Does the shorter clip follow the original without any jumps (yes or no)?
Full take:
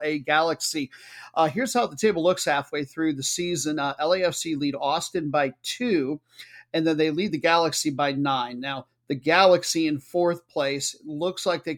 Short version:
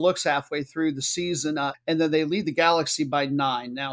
no